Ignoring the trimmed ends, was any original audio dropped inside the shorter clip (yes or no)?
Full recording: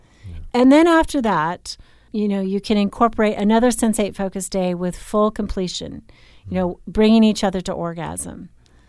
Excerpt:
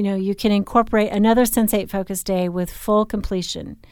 no